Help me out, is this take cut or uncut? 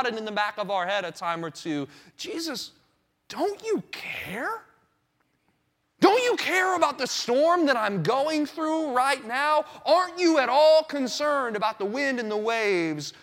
uncut